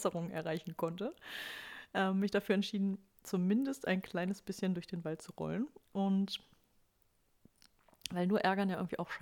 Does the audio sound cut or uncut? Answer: cut